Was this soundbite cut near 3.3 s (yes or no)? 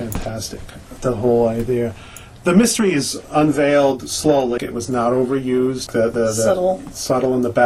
no